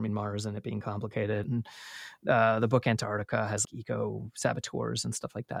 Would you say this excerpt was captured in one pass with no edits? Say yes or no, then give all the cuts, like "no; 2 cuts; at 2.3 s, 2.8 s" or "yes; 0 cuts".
no; 2 cuts; at 1.4 s, 3.6 s